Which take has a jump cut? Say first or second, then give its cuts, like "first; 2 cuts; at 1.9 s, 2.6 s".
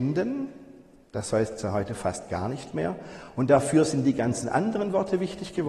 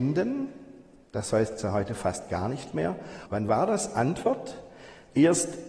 second; 1 cut; at 3.3 s